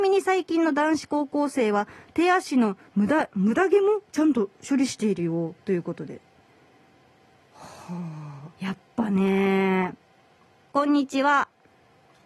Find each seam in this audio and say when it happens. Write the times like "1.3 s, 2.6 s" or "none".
8.5 s, 10.7 s